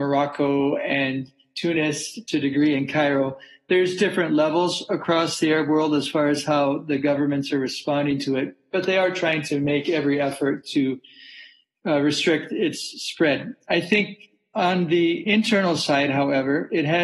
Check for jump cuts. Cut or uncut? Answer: uncut